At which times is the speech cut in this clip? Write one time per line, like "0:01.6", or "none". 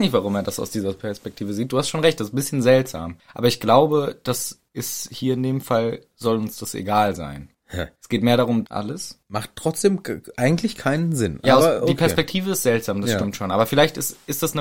0:08.6